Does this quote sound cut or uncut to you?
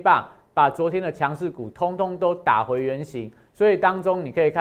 uncut